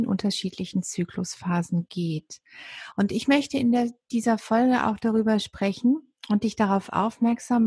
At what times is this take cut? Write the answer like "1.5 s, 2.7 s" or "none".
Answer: none